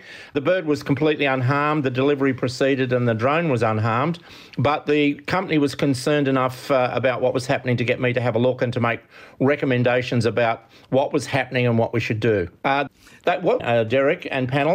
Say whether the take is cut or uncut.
cut